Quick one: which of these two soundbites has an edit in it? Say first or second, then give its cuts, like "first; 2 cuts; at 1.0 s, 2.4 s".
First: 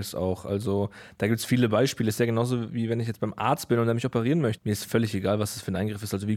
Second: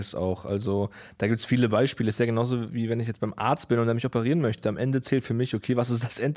first; 1 cut; at 4.6 s